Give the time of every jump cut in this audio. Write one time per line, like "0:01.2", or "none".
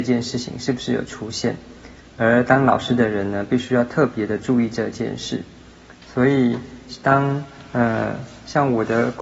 none